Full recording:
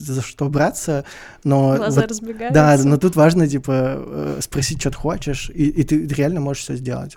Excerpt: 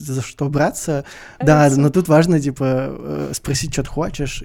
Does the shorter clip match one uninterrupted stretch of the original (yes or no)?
no